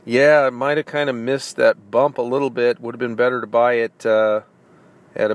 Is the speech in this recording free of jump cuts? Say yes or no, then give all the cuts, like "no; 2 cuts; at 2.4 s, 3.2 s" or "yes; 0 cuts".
yes; 0 cuts